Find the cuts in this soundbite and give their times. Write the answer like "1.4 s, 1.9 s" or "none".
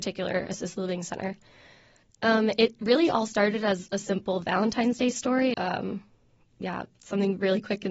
2.0 s, 5.5 s